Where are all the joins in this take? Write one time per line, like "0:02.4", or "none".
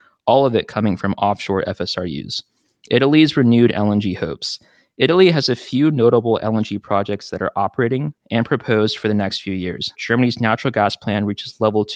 0:08.2
0:09.9